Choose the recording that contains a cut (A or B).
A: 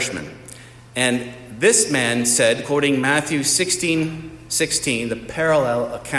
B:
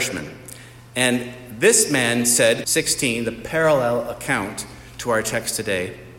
B